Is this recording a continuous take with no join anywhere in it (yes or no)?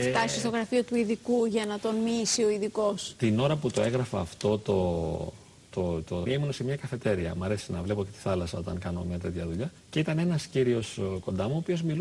no